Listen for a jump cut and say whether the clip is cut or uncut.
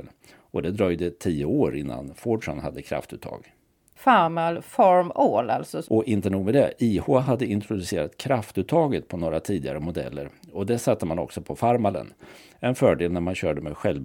cut